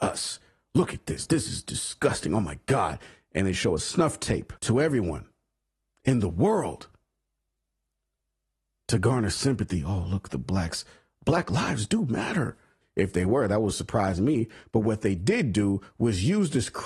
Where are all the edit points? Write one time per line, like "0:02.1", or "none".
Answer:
0:04.6
0:12.8